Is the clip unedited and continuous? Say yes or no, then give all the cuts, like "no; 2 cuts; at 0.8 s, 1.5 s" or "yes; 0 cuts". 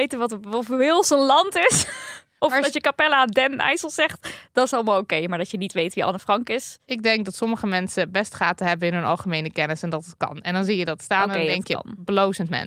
yes; 0 cuts